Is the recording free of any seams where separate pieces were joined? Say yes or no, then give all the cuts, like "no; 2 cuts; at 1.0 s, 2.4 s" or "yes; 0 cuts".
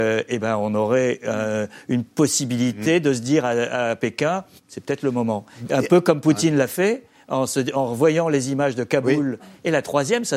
no; 2 cuts; at 4.6 s, 9.4 s